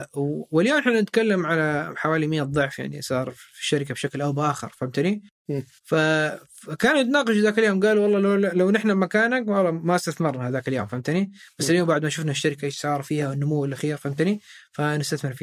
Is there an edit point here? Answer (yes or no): no